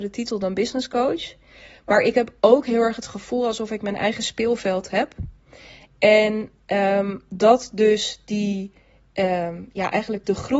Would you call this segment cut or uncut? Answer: uncut